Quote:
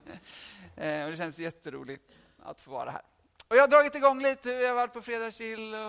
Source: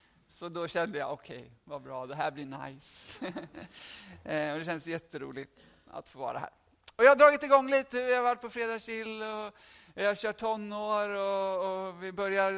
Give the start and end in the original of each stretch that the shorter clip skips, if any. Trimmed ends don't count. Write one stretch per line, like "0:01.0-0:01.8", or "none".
none